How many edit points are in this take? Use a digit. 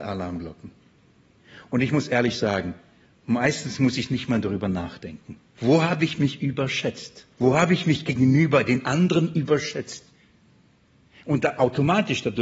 2